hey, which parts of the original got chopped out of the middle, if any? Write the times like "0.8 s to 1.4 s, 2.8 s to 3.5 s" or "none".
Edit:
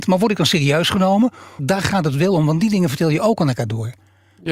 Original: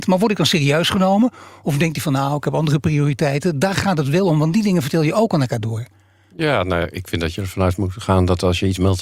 1.6 s to 3.5 s